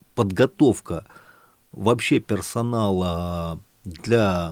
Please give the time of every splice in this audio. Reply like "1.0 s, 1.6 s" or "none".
none

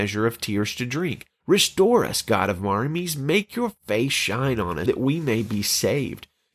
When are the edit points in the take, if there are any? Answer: 1.3 s, 4.9 s

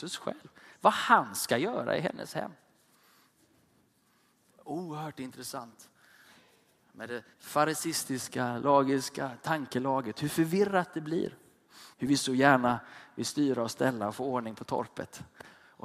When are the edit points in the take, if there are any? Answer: 7.3 s, 11.9 s

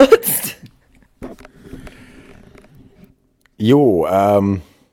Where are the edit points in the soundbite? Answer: none

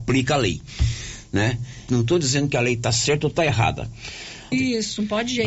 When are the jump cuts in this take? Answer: 1.9 s, 4.5 s

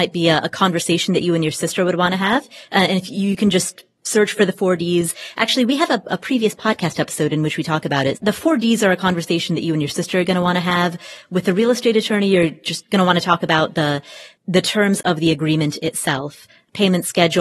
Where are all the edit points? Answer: 8.1 s

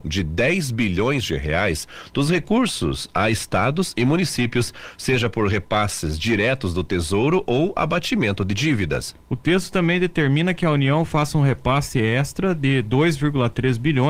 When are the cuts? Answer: none

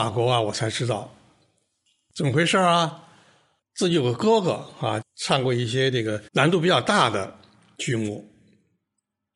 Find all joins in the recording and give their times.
3.6 s, 5.0 s, 6.3 s

